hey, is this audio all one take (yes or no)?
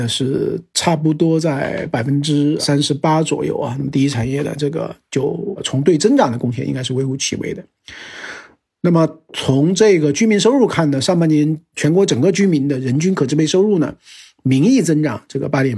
yes